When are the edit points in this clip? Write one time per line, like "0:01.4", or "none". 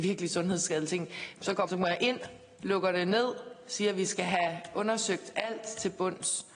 0:01.7